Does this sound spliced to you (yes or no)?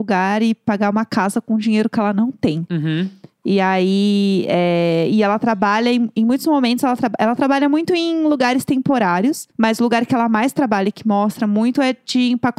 yes